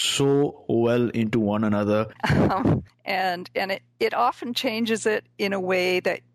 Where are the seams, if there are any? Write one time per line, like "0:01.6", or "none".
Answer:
0:02.1